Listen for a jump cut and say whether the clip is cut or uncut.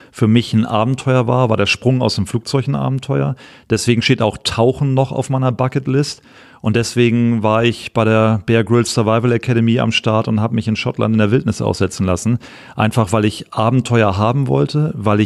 uncut